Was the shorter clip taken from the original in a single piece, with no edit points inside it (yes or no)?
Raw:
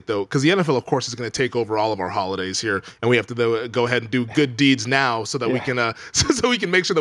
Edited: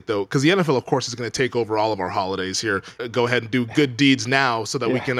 no